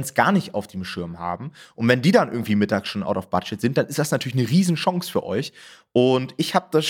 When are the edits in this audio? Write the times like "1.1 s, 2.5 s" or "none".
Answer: none

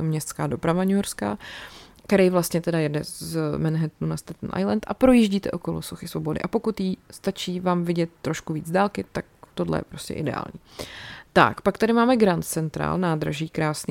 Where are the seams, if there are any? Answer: none

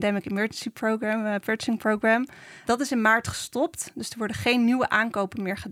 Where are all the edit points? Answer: 2.7 s

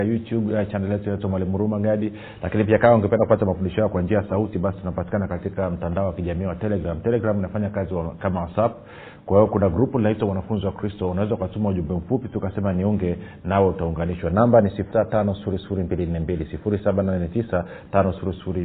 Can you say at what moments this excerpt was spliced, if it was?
14.9 s

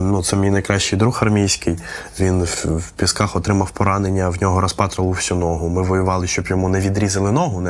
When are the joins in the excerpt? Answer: none

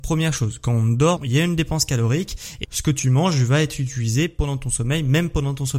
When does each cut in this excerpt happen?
1.2 s, 2.6 s

